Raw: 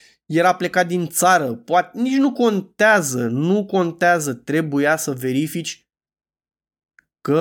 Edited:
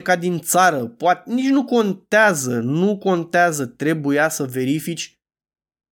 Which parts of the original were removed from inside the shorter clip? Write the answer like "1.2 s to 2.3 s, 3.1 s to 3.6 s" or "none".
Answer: none